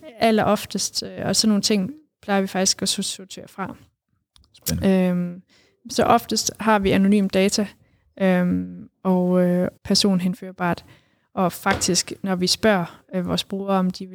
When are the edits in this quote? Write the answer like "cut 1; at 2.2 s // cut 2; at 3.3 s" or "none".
cut 1; at 9.8 s